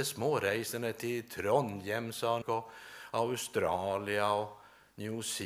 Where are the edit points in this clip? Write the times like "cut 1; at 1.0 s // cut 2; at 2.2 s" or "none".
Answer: cut 1; at 2.4 s